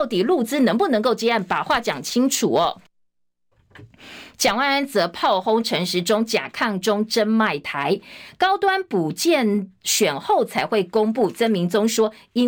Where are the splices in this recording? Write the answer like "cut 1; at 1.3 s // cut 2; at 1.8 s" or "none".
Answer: none